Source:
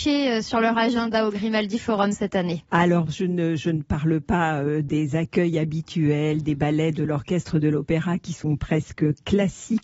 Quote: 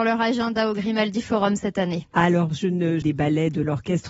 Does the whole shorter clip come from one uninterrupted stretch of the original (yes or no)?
no